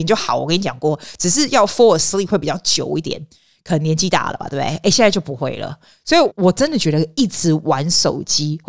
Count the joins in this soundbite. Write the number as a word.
one